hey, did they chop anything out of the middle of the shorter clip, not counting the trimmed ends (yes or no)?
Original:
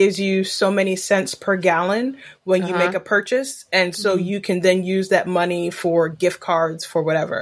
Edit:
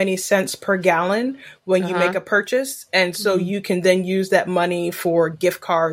no